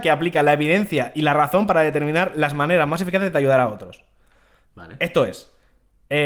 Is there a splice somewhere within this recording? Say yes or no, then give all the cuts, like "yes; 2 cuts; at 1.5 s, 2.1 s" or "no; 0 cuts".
yes; 1 cut; at 4.6 s